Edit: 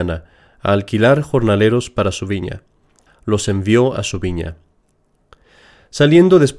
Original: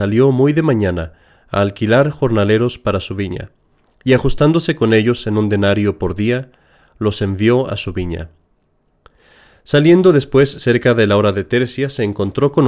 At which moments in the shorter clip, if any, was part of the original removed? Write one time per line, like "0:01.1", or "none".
0:03.1